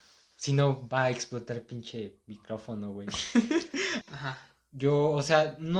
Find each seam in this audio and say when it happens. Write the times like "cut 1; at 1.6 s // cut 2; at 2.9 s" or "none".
cut 1; at 4.0 s